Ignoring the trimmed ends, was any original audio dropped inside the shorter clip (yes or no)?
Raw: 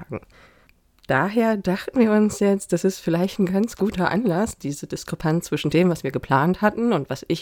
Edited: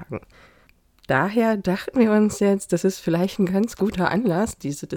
no